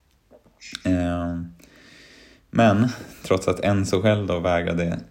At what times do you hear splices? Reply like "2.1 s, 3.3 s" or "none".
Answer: none